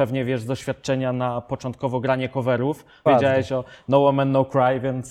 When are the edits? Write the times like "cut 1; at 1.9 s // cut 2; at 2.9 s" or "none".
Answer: cut 1; at 3.1 s